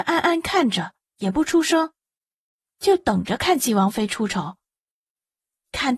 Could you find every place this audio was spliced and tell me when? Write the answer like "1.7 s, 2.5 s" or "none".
none

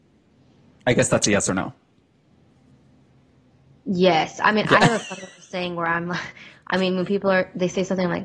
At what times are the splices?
none

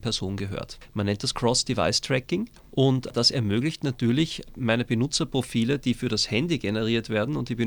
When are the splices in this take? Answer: none

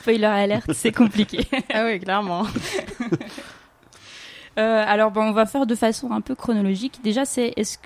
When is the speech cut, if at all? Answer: none

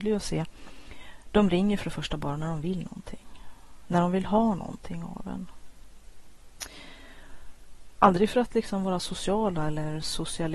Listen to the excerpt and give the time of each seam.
8.0 s

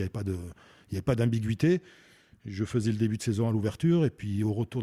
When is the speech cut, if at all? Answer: none

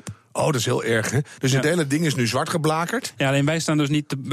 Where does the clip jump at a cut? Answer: none

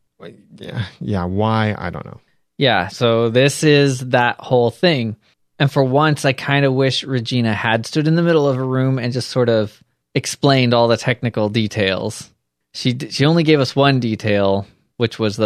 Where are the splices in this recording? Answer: none

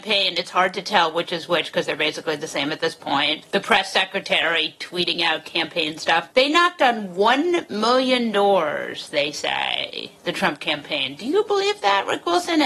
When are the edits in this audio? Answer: 3.4 s

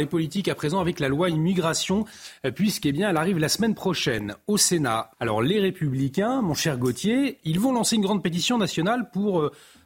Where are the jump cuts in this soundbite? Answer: 5.1 s

